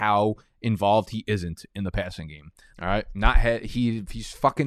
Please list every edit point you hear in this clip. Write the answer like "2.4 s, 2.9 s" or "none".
2.7 s